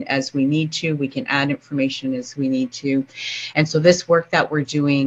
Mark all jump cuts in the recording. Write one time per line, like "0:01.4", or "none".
0:03.5